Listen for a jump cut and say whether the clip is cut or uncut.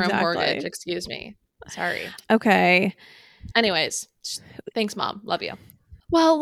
uncut